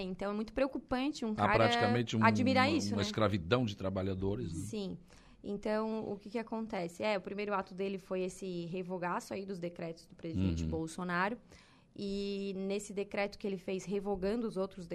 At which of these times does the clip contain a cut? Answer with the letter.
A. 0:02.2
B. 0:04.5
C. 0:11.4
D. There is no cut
D